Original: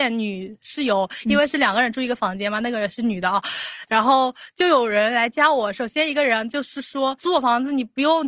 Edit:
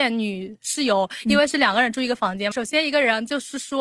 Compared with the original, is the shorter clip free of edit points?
no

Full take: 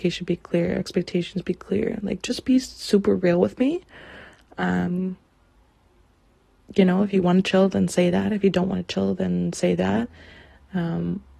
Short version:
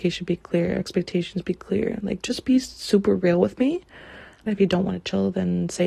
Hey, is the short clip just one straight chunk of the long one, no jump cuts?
no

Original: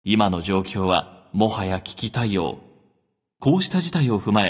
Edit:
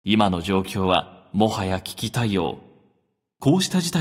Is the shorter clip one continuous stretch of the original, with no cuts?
yes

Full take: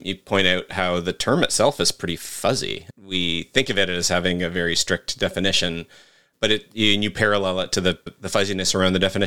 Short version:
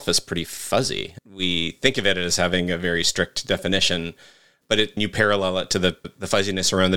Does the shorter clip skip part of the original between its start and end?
yes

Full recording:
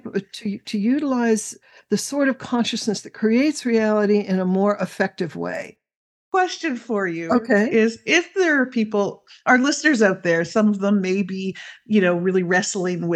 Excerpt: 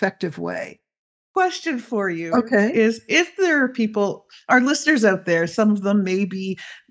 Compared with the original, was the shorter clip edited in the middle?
no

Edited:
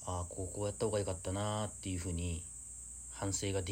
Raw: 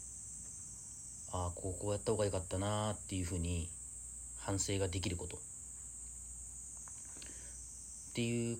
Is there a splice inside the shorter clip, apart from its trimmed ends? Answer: no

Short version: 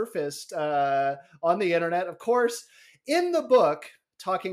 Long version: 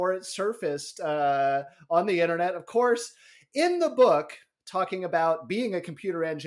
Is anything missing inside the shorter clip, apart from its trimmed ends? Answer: no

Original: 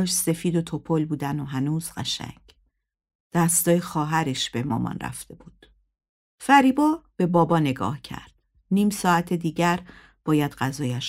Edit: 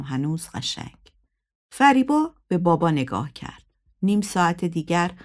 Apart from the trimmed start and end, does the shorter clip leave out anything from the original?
yes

